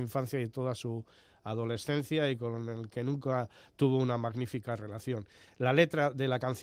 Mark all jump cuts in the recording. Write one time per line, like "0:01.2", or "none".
none